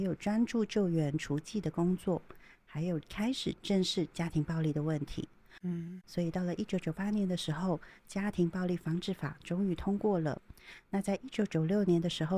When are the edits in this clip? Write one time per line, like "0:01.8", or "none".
none